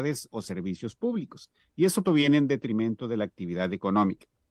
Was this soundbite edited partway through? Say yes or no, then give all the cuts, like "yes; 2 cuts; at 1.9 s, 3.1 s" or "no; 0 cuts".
yes; 1 cut; at 2.0 s